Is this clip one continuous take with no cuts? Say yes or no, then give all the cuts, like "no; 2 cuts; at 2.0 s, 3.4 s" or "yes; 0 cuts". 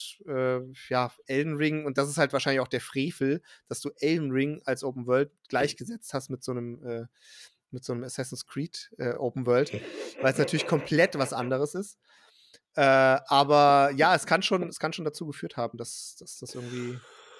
yes; 0 cuts